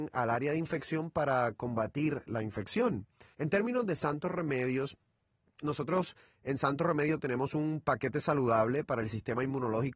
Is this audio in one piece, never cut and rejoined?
no; 2 cuts; at 3.3 s, 5.6 s

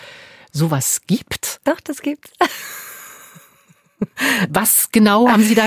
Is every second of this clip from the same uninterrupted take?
yes; 0 cuts

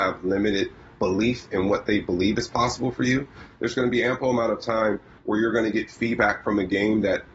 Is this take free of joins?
yes; 0 cuts

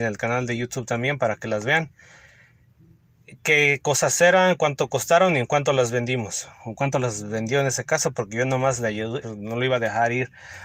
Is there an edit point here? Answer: yes; 1 cut; at 9.2 s

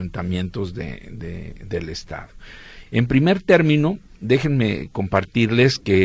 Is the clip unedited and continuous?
no; 1 cut; at 2.9 s

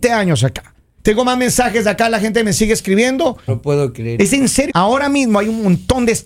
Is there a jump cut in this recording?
yes; 3 cuts; at 1.0 s, 3.5 s, 4.7 s

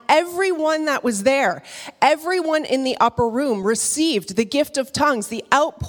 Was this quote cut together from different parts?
no; 0 cuts

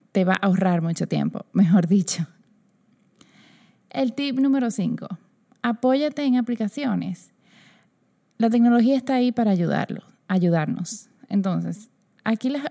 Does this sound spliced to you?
no; 0 cuts

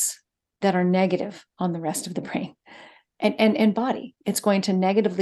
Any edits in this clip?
no; 0 cuts

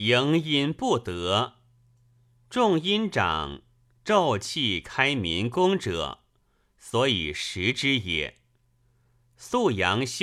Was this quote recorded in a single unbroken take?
yes; 0 cuts

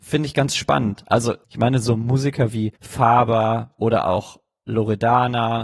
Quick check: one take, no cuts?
no; 2 cuts; at 1.4 s, 2.8 s

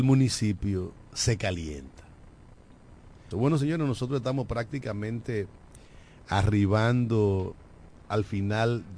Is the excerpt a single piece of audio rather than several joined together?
no; 1 cut; at 3.3 s

